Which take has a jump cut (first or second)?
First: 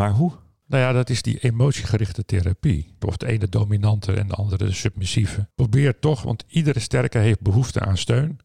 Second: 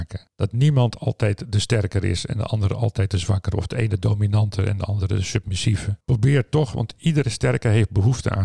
first